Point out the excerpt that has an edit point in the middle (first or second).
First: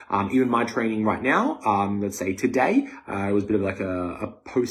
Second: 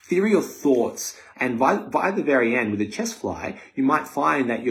second